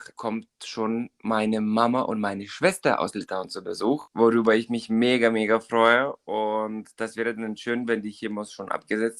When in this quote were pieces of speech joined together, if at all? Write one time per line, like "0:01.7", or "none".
none